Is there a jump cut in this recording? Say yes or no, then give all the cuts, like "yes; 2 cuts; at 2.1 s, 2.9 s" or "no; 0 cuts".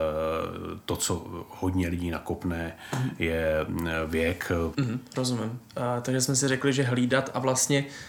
yes; 1 cut; at 4.7 s